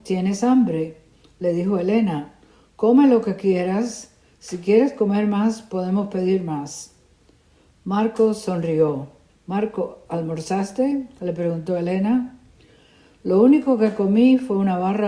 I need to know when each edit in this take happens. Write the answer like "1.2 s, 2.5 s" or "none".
9.3 s

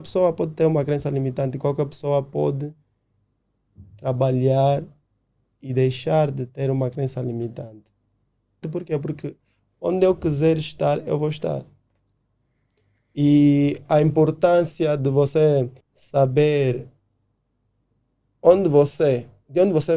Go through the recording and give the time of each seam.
8.6 s, 15.8 s

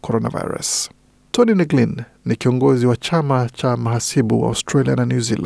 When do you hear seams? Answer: none

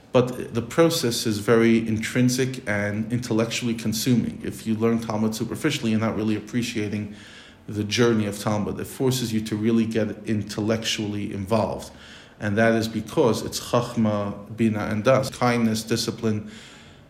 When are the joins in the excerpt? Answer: 15.3 s

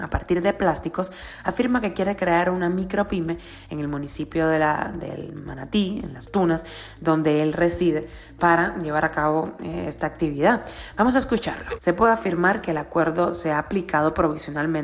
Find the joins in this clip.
11.8 s

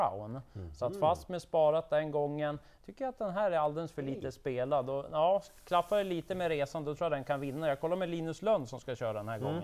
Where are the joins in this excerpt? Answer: none

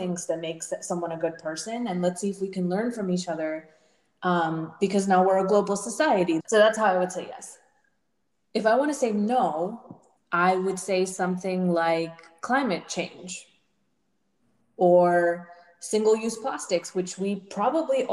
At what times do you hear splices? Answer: 6.4 s, 10.2 s

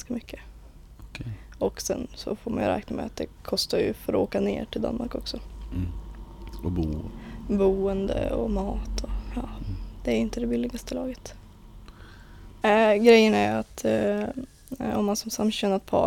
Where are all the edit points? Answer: 12.6 s

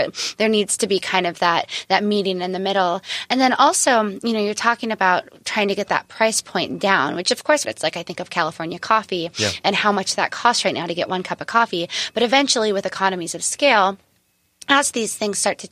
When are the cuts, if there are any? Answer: 7.6 s

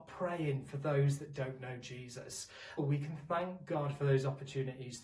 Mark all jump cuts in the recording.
2.8 s

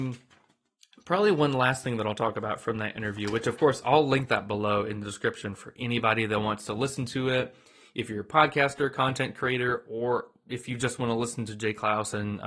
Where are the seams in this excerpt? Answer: none

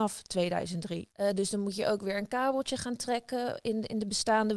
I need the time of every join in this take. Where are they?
1.1 s

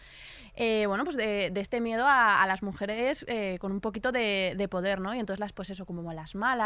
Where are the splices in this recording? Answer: 5.5 s

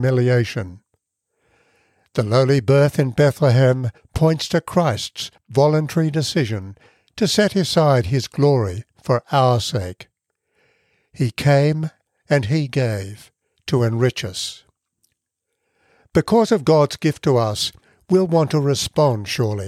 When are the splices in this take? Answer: none

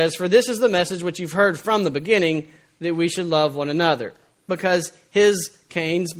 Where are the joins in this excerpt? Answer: 4.5 s

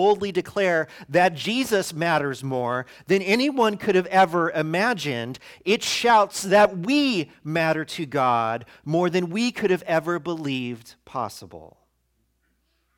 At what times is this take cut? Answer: none

